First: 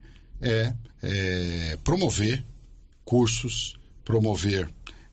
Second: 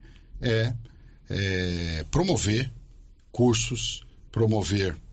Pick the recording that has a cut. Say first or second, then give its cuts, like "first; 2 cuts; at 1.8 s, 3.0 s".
first; 1 cut; at 0.9 s